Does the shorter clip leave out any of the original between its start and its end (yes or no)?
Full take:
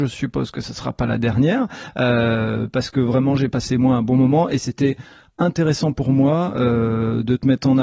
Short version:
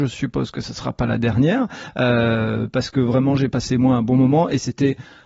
no